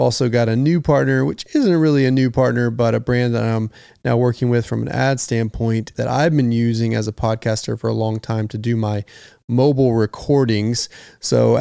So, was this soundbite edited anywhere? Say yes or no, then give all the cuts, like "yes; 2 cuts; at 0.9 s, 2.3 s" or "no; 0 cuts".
yes; 1 cut; at 5.9 s